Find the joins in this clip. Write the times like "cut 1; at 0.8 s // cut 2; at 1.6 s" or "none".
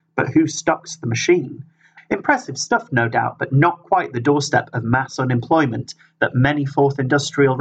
cut 1; at 2.0 s